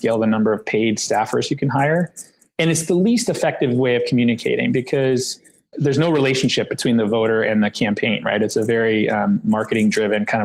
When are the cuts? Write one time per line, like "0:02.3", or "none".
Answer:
0:05.7